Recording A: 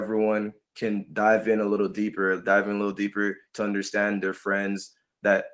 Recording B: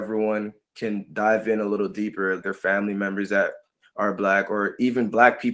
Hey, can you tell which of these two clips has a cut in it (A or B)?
B